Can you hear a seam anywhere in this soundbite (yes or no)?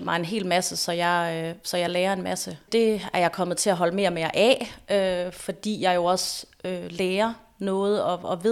yes